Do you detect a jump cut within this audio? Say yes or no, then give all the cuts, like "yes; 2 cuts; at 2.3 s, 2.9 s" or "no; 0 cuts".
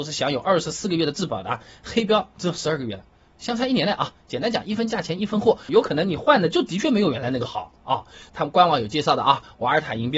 yes; 2 cuts; at 5.7 s, 8.3 s